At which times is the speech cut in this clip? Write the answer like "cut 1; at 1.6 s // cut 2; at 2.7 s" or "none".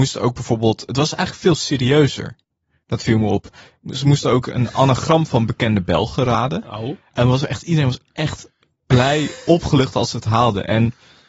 none